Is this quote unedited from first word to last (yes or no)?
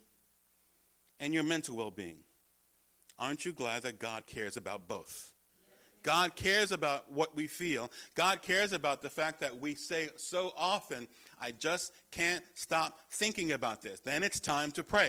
yes